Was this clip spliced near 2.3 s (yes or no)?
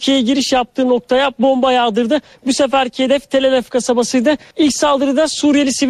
yes